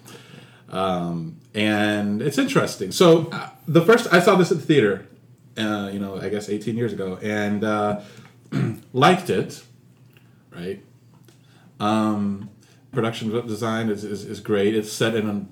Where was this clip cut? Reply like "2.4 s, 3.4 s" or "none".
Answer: 10.5 s, 12.9 s